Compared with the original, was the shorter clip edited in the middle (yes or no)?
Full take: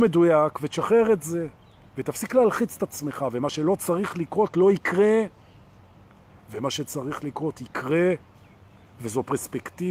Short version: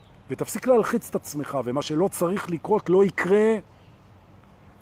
no